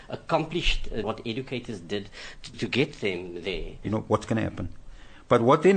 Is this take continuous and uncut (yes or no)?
no